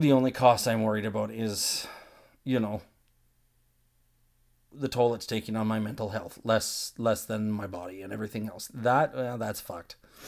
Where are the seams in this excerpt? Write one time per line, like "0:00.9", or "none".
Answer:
none